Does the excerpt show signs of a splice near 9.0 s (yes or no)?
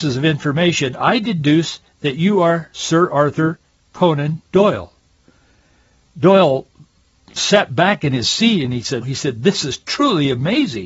yes